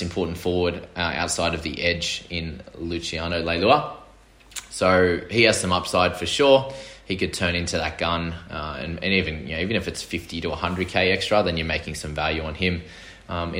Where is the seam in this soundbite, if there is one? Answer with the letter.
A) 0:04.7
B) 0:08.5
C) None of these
C